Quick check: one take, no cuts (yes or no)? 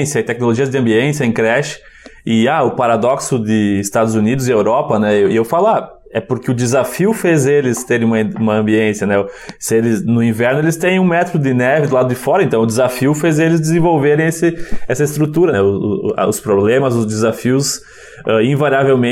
no